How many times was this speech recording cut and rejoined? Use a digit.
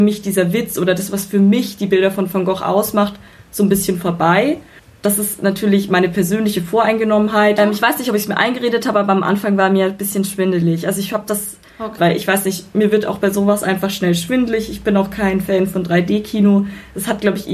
2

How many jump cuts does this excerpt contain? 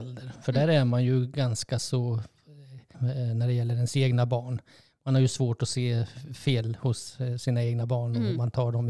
1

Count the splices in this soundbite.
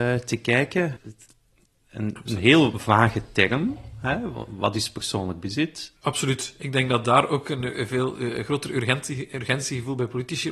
2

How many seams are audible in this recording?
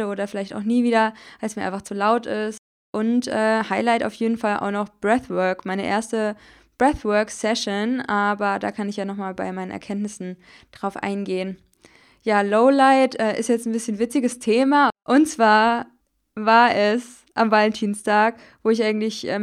0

